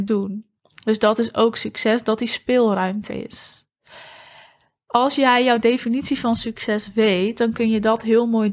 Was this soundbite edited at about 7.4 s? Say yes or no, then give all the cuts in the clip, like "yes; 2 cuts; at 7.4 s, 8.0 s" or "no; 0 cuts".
no; 1 cut; at 3.1 s